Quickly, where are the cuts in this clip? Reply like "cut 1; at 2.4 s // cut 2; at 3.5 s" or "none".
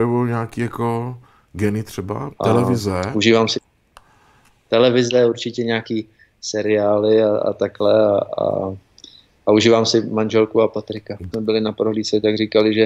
cut 1; at 2.3 s // cut 2; at 11.3 s